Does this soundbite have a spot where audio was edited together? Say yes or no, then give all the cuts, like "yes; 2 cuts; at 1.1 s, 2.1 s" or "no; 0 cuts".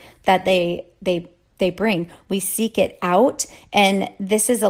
yes; 1 cut; at 2.2 s